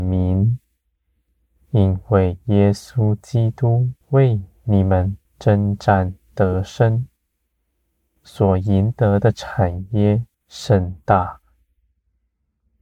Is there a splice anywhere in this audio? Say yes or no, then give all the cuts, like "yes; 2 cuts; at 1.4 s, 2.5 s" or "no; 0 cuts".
yes; 3 cuts; at 4.0 s, 5.2 s, 10.3 s